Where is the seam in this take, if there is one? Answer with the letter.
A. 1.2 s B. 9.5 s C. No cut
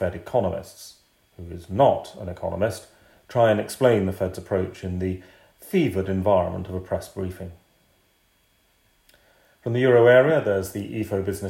A